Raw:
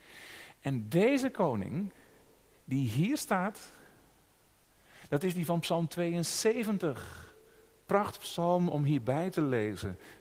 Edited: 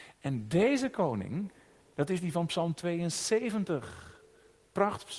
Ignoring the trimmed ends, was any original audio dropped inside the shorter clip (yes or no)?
yes